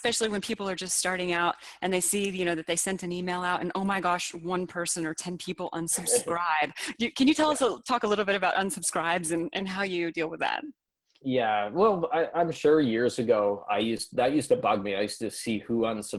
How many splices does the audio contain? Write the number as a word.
zero